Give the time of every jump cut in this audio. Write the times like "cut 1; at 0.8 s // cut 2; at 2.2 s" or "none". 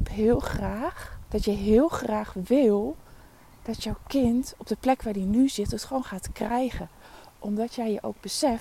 cut 1; at 1.3 s